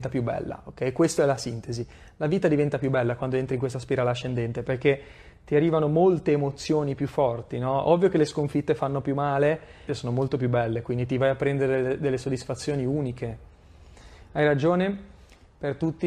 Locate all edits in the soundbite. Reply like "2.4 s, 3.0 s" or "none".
9.9 s